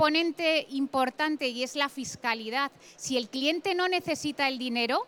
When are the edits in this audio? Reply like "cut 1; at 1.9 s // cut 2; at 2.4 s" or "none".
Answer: none

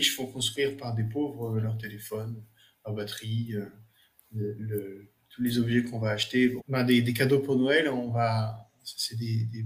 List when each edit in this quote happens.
cut 1; at 6.6 s

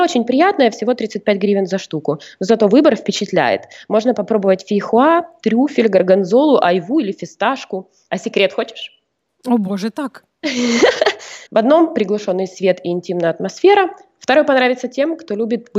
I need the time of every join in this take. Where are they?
cut 1; at 8.1 s // cut 2; at 11.5 s

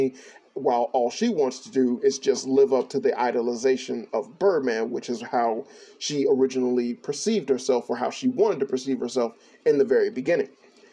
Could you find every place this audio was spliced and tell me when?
none

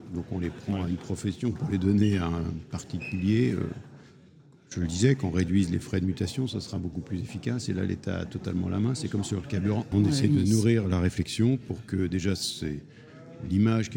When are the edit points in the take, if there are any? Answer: cut 1; at 9.9 s

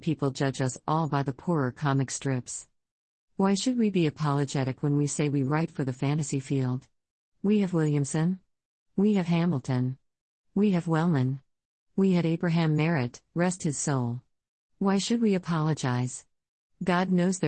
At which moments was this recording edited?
none

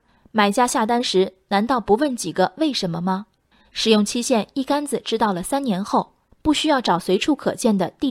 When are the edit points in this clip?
cut 1; at 6.3 s

